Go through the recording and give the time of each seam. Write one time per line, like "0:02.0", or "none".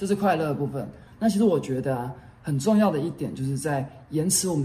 0:01.1